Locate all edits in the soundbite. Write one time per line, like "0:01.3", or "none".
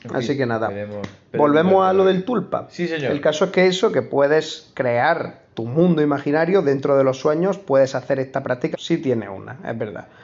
0:08.7